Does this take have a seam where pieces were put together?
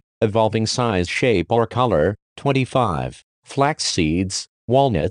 no; 0 cuts

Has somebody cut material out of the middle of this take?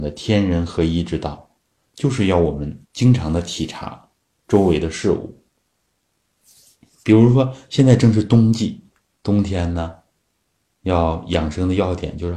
yes; 2 cuts; at 2.8 s, 9.2 s

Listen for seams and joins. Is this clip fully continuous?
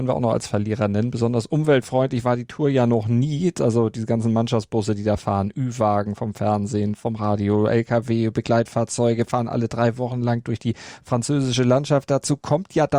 yes; 0 cuts

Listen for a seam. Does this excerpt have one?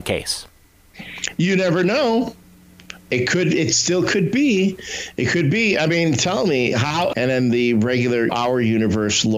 yes; 2 cuts; at 7.1 s, 8.3 s

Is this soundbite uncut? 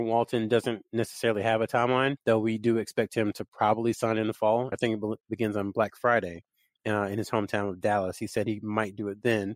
no; 1 cut; at 4.7 s

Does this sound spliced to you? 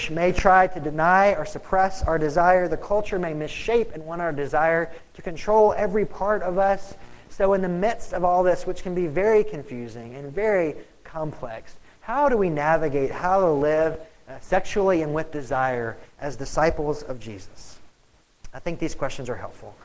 no; 0 cuts

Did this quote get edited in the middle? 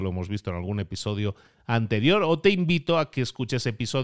no; 0 cuts

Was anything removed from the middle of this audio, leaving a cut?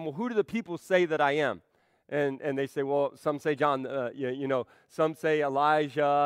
no; 0 cuts

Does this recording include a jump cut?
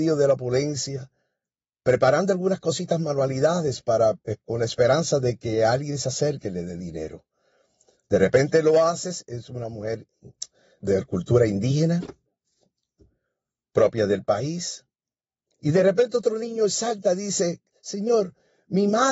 yes; 1 cut; at 10.8 s

